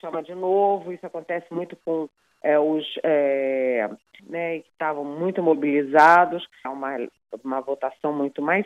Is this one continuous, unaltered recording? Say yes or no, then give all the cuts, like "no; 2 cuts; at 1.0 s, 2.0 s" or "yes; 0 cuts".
no; 2 cuts; at 4.2 s, 6.6 s